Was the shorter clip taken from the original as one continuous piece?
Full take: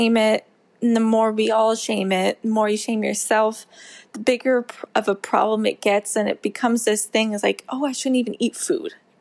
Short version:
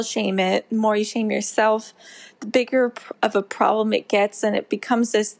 yes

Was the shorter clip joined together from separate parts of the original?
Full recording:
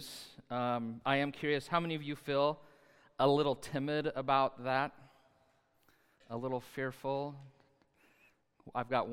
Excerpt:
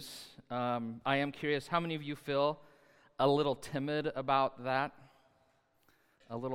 no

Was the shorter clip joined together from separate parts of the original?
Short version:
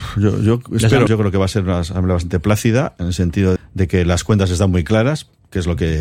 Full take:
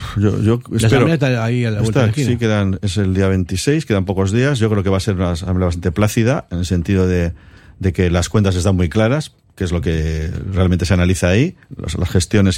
yes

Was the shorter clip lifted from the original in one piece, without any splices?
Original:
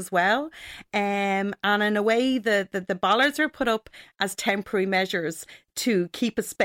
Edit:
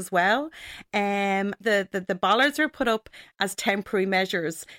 no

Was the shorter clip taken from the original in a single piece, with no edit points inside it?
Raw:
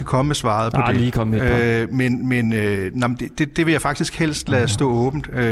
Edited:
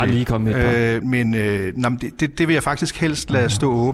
no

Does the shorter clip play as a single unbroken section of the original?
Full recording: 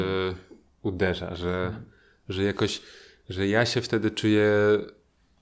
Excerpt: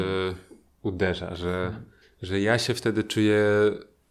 no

